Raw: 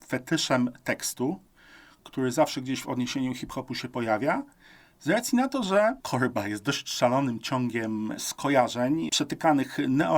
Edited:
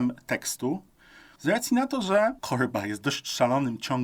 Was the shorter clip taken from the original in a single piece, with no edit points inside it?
no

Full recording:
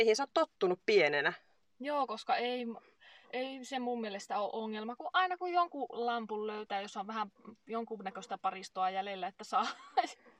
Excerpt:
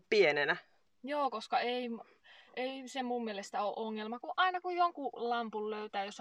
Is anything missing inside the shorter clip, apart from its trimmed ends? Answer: no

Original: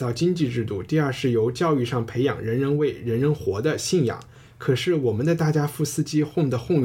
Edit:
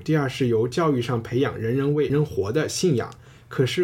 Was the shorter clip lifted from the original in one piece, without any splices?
no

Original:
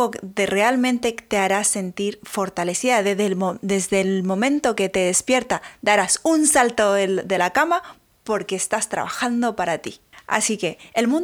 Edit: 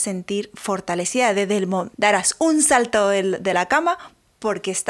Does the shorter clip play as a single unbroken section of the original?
no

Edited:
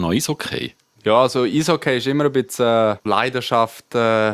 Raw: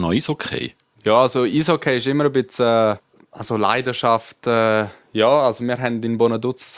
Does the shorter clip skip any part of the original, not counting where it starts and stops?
yes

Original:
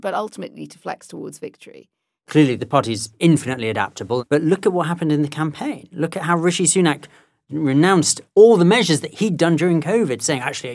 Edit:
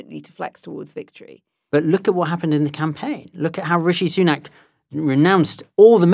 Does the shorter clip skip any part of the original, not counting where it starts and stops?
yes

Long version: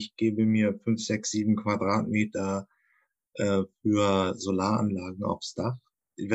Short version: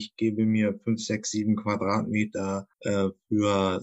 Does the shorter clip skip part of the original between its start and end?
yes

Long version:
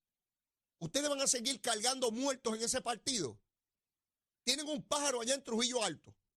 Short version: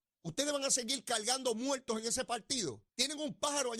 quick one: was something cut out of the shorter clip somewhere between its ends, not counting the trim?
yes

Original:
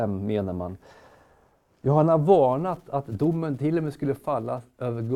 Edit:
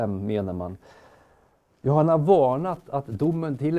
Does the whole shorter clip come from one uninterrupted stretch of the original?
yes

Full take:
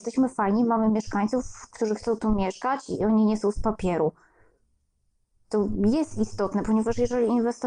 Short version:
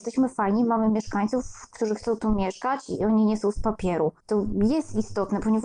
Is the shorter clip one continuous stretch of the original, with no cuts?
no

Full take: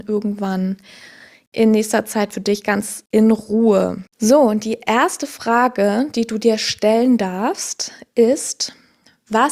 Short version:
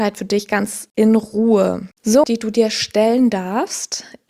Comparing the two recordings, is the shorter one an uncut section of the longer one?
no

